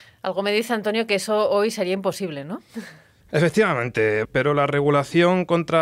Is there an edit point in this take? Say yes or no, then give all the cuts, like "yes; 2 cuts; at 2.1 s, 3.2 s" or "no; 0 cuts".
yes; 1 cut; at 4.2 s